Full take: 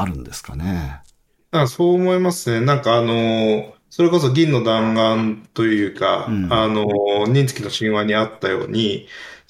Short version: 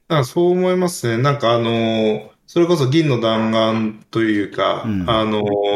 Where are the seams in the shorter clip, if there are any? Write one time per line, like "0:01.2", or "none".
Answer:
none

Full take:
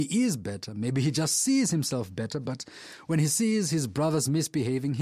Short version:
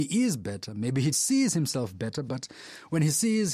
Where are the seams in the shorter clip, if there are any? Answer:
0:01.1

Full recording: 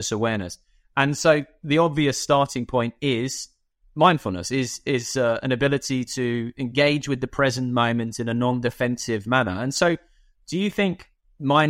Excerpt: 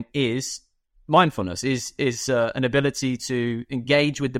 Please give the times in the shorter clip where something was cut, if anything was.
none

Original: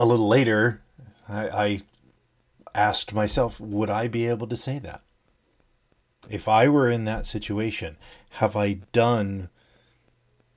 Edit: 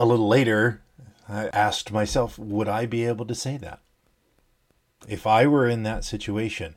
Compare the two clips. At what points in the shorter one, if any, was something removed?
0:01.5

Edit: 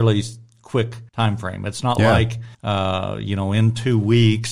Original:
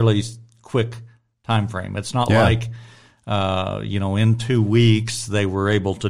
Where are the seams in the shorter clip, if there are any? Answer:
0:01.1
0:02.5

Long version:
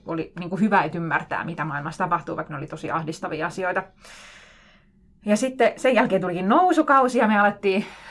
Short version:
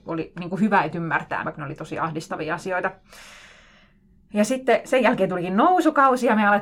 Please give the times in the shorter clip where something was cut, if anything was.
0:01.4

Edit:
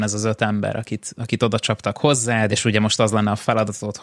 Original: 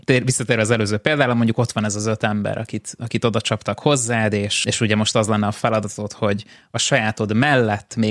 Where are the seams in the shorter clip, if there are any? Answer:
0:02.5

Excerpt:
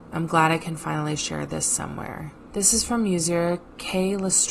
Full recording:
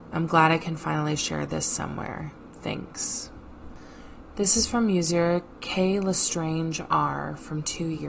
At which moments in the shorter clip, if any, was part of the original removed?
0:02.5

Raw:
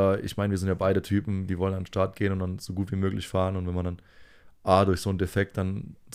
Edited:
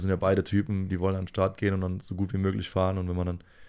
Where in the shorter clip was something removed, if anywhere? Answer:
none

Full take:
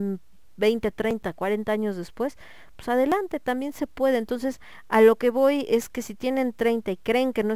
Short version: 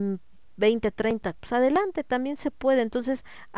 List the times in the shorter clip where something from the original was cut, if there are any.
0:01.3

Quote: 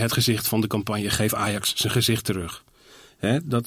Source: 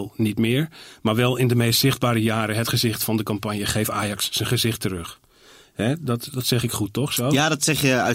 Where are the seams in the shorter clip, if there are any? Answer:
none

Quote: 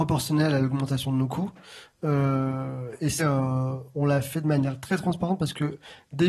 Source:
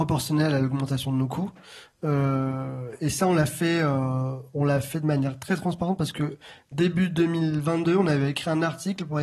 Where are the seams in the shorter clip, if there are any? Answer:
0:03.2

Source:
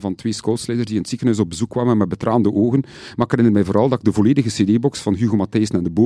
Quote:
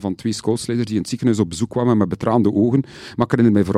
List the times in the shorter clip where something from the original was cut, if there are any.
none

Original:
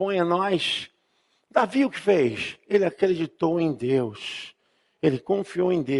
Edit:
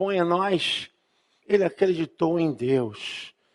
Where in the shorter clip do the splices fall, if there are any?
0:01.4

